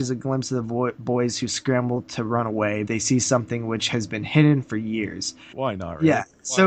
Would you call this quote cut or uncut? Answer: cut